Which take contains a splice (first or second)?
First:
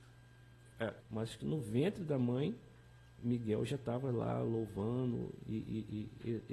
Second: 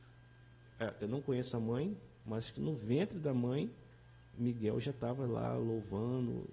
first